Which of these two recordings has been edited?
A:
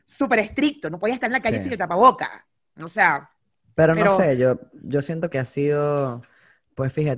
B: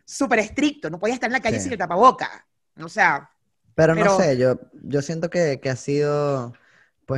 A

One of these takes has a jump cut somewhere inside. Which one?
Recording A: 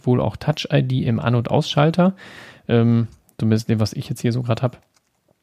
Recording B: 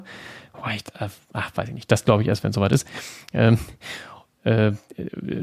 A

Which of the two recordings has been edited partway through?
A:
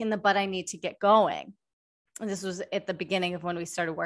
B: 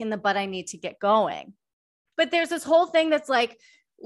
B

